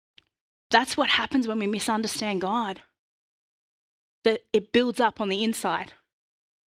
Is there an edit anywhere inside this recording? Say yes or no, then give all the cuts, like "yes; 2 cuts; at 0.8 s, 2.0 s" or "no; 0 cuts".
no; 0 cuts